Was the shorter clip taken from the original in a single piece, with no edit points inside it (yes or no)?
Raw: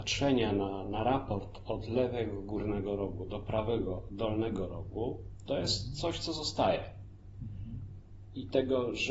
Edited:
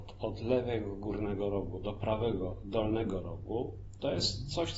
yes